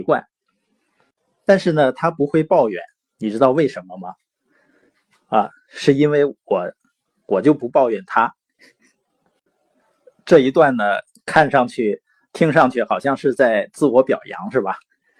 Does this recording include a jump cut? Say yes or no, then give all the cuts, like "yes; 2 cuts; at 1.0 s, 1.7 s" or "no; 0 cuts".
no; 0 cuts